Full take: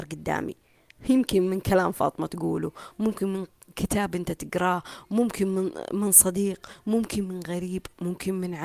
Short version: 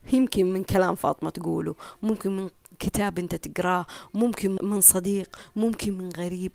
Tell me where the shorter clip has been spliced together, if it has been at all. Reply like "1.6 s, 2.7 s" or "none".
4.6 s

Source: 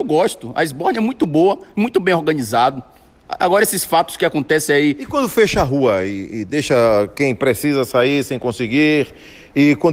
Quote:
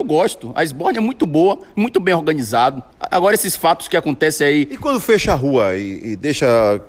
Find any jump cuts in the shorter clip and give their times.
2.9 s

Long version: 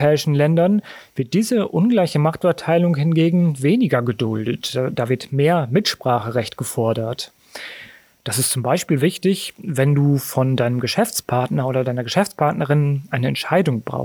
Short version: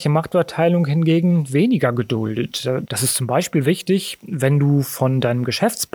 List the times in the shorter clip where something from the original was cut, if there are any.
2.8 s

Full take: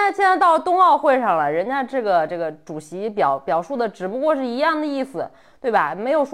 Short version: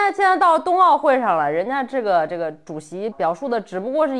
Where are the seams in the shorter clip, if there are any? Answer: 3.1 s

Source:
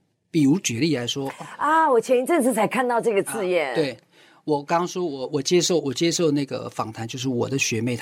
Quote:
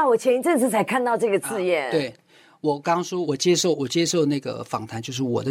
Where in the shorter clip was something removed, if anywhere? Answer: 3.2 s

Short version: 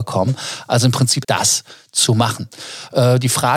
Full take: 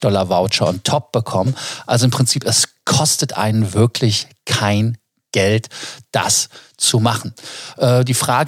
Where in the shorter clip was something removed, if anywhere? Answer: 1.2 s

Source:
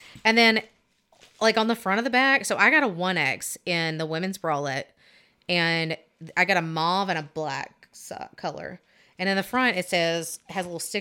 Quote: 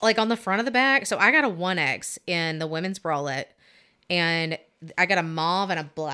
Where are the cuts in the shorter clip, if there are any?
none

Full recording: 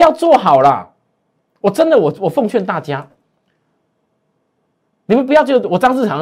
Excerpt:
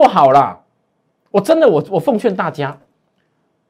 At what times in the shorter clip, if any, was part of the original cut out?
none

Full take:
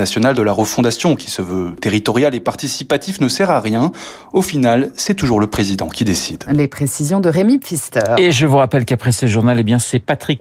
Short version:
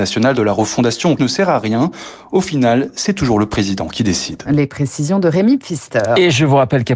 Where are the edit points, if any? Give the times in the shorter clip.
1.2 s

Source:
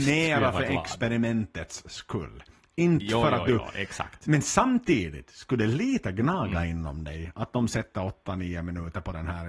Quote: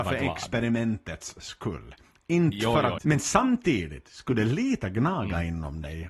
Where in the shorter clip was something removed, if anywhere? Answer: 3.0 s

